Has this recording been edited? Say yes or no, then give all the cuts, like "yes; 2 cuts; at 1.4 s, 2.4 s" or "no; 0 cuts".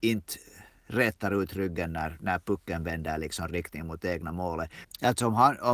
yes; 1 cut; at 4.8 s